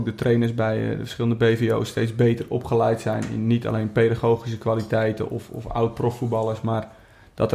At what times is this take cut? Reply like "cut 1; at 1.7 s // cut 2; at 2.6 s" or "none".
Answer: none